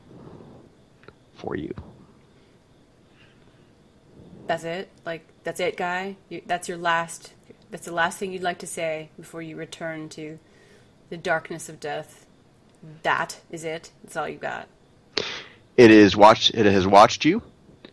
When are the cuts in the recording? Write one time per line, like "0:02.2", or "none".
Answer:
none